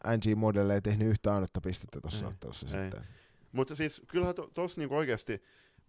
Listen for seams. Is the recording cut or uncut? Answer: uncut